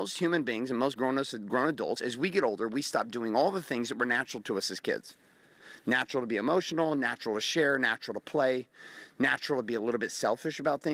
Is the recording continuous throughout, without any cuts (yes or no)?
yes